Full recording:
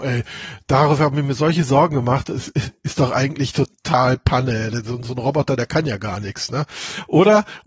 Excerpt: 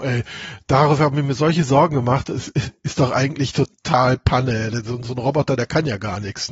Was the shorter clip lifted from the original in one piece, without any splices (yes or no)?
yes